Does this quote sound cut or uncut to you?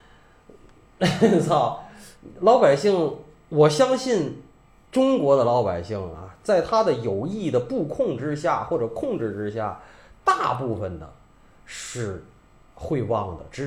uncut